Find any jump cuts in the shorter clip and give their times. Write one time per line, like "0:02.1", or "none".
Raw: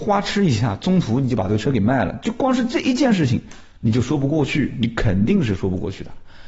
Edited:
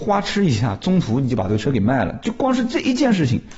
none